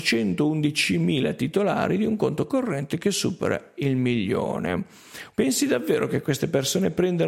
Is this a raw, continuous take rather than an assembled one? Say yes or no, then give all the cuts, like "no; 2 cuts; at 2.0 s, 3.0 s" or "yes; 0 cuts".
no; 1 cut; at 5.3 s